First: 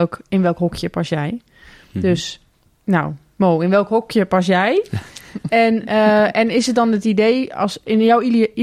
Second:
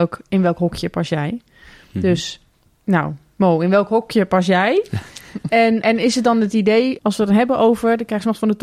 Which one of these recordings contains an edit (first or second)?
second